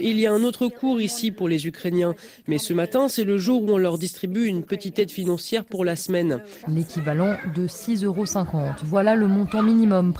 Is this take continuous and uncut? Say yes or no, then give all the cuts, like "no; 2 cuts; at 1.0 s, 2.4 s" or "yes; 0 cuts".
no; 1 cut; at 6.6 s